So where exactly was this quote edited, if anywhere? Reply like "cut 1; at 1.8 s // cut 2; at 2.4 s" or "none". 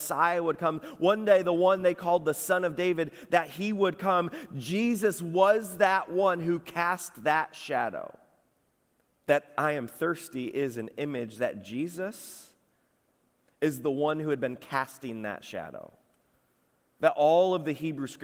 cut 1; at 9.2 s